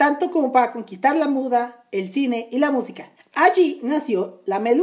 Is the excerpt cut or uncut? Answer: cut